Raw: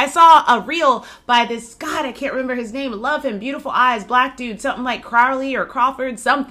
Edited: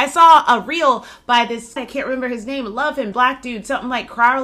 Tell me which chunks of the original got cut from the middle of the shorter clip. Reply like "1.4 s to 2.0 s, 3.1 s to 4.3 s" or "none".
1.8 s to 2.0 s, 3.4 s to 4.1 s